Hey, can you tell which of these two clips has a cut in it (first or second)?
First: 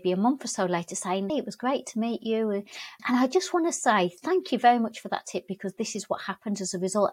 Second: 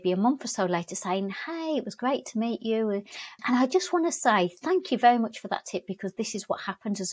first